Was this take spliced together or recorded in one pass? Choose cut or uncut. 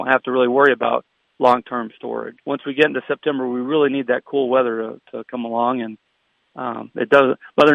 cut